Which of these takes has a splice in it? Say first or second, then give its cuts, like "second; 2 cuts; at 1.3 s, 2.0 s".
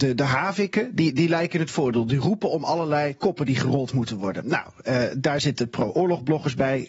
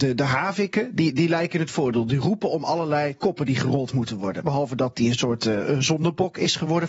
second; 1 cut; at 4.4 s